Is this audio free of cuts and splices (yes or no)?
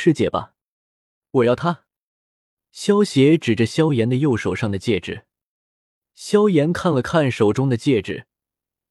yes